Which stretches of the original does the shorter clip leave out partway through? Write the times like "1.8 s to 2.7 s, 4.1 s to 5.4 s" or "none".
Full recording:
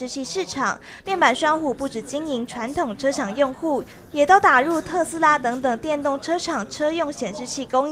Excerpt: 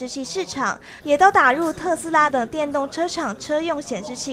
1.0 s to 4.1 s, 5.4 s to 5.6 s